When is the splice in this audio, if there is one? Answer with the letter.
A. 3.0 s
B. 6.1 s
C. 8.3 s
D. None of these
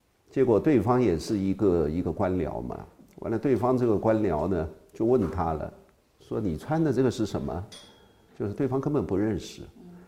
C